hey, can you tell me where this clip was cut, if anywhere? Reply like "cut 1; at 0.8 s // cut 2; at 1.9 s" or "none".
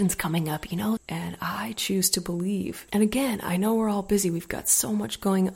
cut 1; at 1.0 s // cut 2; at 2.9 s